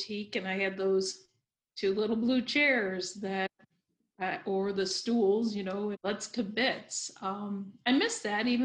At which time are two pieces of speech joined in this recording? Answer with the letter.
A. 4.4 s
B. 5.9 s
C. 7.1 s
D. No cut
B